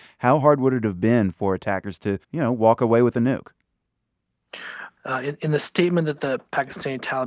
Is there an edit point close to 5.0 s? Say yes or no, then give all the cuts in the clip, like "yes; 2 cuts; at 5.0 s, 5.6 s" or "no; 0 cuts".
yes; 2 cuts; at 2.2 s, 5.0 s